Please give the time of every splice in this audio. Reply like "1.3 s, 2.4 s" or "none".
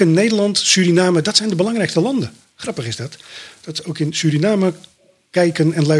none